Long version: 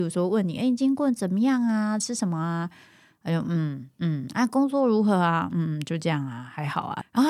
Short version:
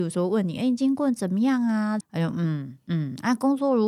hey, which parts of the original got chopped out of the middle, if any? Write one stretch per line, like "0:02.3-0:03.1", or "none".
0:02.0-0:03.1